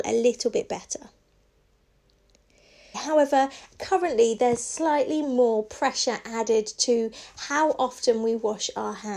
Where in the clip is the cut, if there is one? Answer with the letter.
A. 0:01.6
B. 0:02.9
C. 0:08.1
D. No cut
B